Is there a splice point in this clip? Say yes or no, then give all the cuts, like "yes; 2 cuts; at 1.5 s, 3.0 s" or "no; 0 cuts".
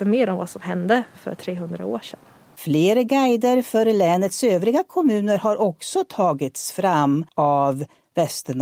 no; 0 cuts